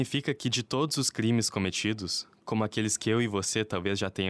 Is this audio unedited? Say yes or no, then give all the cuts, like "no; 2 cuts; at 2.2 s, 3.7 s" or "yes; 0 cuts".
yes; 0 cuts